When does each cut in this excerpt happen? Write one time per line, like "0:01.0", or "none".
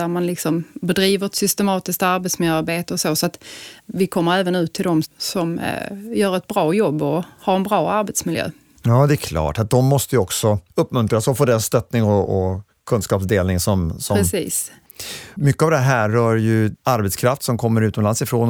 0:05.0